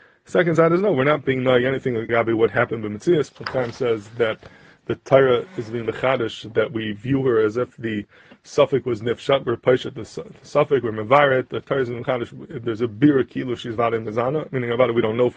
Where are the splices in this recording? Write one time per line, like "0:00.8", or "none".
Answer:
0:02.1
0:03.3